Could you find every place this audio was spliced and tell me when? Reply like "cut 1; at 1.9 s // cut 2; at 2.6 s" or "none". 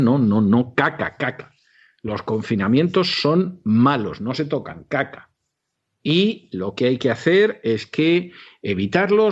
none